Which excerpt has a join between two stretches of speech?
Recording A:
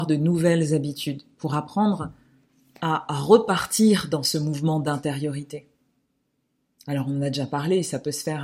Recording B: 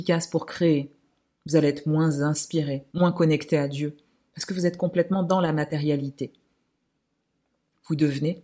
B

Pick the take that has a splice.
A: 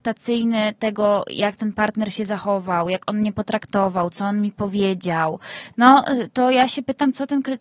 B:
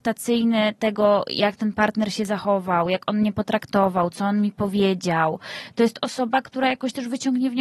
A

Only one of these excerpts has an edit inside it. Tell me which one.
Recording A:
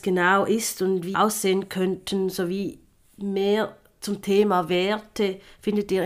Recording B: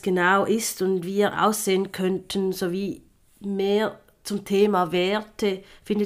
A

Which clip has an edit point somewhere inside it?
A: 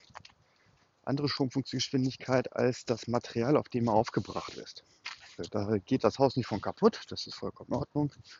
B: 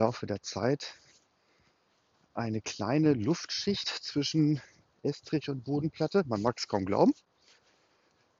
A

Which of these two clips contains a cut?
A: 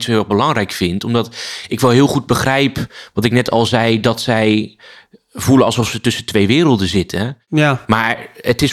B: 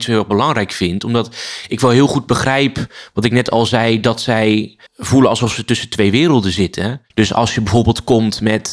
B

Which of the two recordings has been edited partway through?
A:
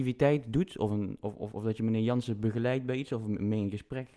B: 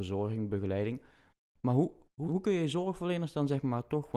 B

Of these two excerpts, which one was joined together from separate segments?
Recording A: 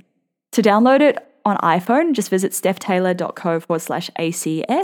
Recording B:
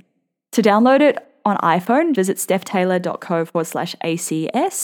B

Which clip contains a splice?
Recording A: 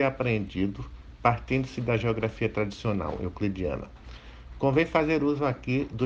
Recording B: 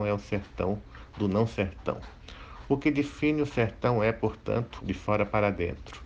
B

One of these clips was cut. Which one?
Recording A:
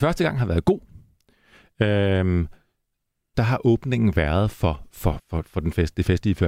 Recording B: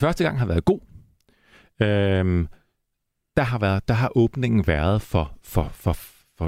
A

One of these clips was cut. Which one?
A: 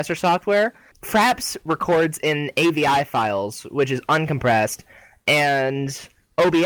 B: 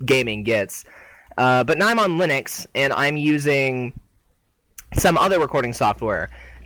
A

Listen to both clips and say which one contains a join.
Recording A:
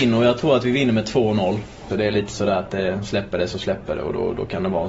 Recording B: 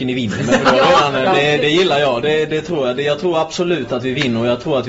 A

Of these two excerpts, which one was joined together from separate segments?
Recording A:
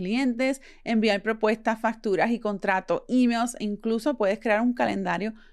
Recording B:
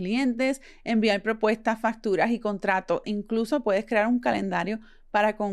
B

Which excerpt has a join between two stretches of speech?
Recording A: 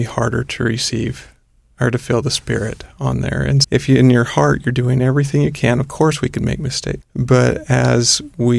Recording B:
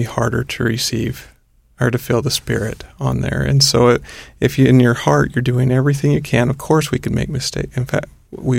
A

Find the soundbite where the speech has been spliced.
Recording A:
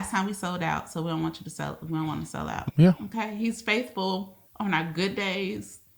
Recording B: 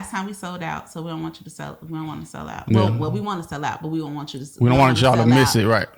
A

